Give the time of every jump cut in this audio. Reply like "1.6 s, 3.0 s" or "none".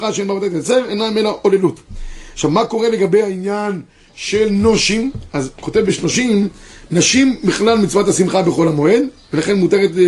6.9 s

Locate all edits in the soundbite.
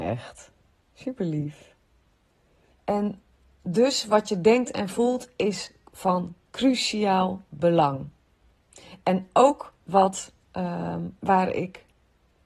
2.7 s

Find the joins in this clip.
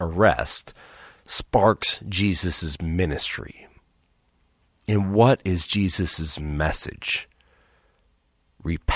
none

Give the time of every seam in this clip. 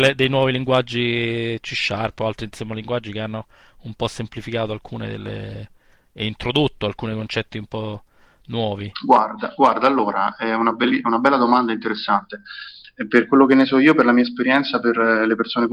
none

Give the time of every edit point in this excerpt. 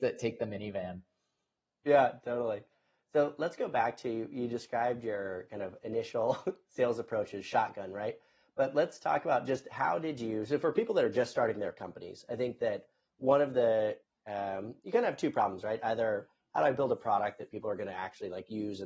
none

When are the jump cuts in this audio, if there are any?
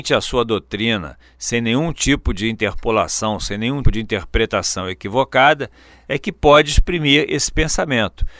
3.8 s

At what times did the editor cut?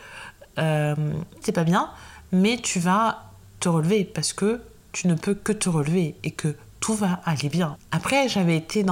1.4 s, 7.8 s

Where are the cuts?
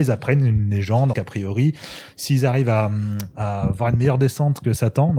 1.1 s

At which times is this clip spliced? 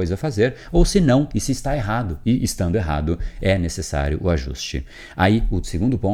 none

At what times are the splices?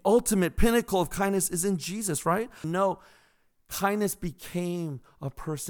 2.6 s

